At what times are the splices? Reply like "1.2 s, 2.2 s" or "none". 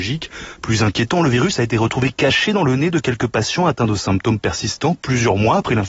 none